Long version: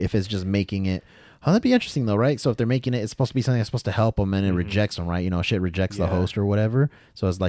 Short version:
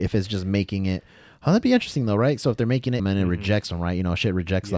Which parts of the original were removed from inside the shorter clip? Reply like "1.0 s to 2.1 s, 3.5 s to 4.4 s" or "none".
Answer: 3.0 s to 4.3 s